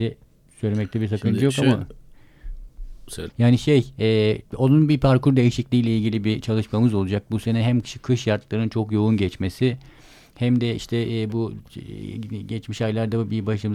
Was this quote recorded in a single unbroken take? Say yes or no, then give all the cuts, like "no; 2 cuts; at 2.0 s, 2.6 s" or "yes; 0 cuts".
no; 1 cut; at 3.3 s